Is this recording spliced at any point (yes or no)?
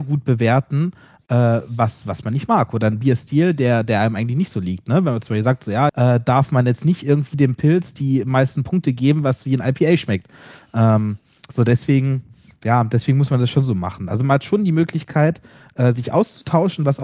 yes